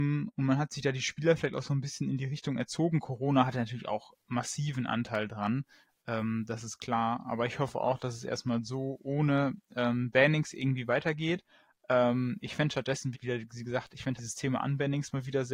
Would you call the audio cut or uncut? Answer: cut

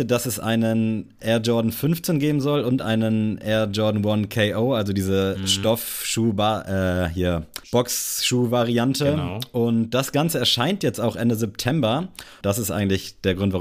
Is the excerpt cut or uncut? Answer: cut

